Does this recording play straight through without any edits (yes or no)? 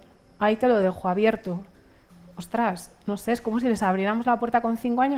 yes